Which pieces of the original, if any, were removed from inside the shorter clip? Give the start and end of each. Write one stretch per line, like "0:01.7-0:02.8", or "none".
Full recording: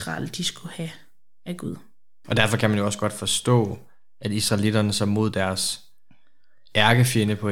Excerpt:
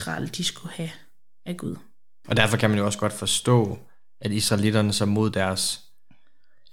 none